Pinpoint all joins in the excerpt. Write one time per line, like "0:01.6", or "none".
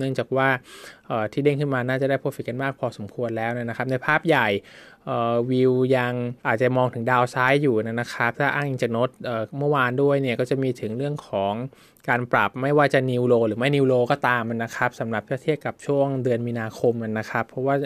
0:06.4